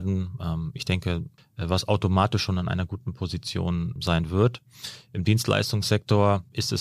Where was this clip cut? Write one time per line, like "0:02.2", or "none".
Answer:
0:01.4
0:04.0

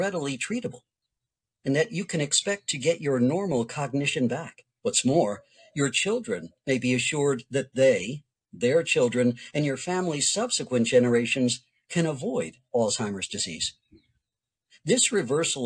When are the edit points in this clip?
0:04.7

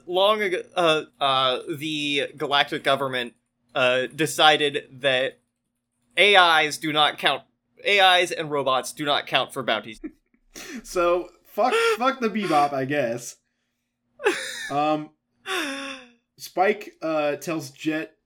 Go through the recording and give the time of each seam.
0:01.1
0:09.9

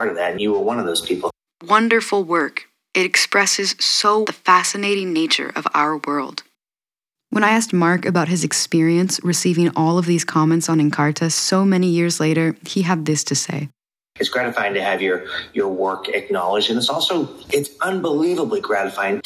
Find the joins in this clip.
0:01.5
0:04.2

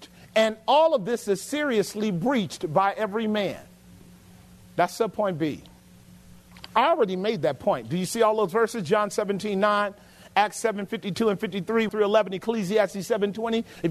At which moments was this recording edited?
0:11.9

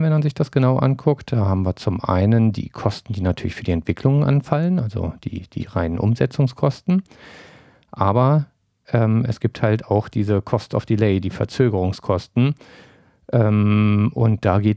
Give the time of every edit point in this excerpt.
none

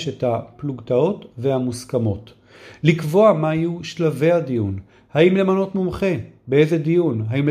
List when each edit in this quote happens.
none

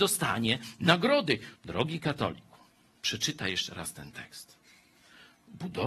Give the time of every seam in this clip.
0:01.6

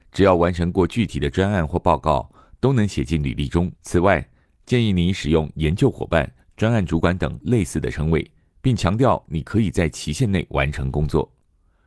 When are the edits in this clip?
0:03.8

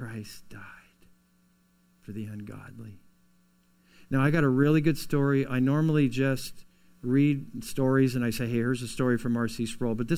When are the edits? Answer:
none

